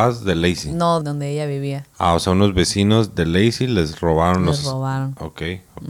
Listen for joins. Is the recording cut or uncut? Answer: cut